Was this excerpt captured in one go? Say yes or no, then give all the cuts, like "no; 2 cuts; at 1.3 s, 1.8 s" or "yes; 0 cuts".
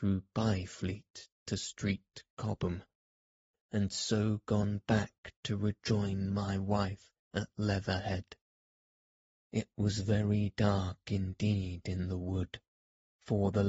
no; 1 cut; at 9.4 s